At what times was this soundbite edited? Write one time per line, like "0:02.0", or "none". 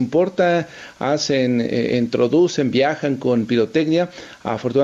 none